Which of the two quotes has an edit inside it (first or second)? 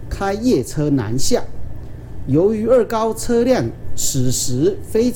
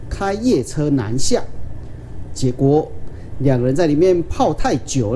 second